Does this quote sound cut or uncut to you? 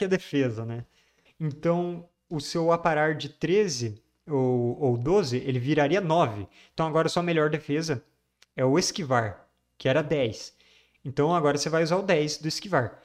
cut